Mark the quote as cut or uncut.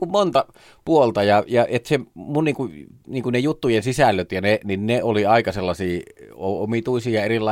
uncut